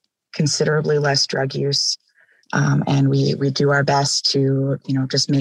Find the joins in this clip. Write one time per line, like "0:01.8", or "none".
0:02.4